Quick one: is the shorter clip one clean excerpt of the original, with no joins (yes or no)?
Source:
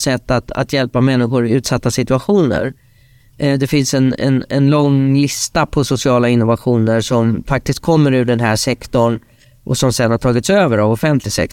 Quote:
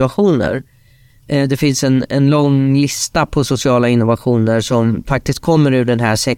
no